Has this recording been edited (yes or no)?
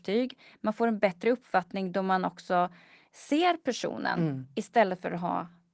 no